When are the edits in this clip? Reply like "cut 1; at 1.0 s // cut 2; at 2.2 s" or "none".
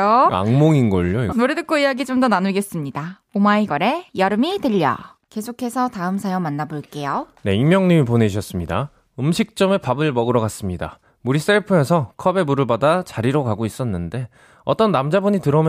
cut 1; at 1.3 s // cut 2; at 5.3 s